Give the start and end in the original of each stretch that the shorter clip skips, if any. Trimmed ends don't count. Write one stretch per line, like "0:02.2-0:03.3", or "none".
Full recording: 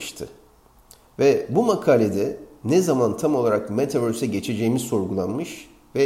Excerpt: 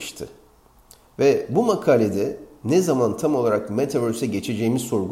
none